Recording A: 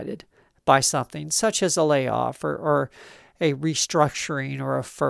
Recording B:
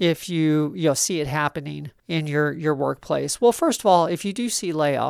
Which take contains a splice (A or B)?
B